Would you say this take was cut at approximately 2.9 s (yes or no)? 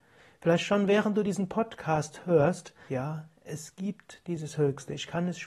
yes